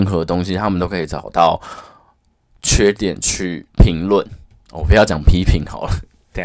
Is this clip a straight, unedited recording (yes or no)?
no